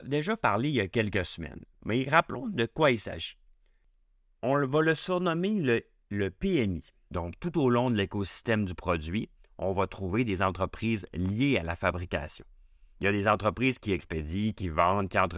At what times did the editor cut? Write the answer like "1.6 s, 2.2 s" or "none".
7.1 s